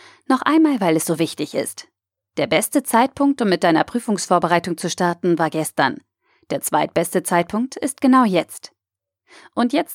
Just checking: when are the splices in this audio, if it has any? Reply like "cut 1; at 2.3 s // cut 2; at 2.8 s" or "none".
none

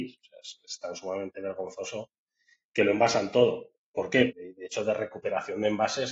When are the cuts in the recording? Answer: cut 1; at 2.6 s // cut 2; at 4.3 s

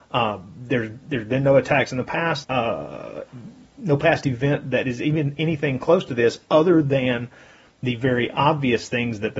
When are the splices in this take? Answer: cut 1; at 2.4 s

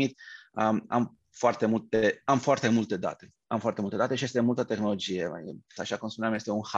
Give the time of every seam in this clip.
cut 1; at 5.8 s

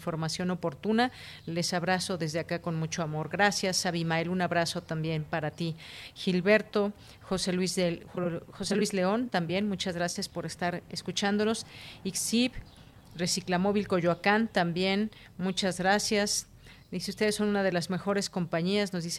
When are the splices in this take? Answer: cut 1; at 13.1 s

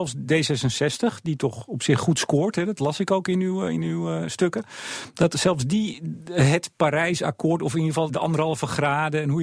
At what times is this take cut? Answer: cut 1; at 8.1 s

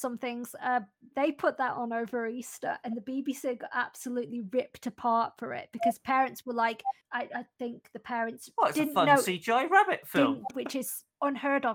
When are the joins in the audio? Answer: cut 1; at 1.1 s // cut 2; at 10.5 s

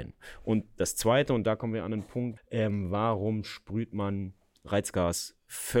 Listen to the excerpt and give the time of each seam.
cut 1; at 2.4 s

